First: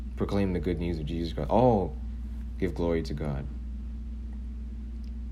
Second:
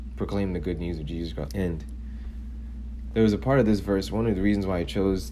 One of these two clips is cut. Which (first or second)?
second